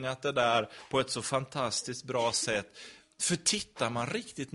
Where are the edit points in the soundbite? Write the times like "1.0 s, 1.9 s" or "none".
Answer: none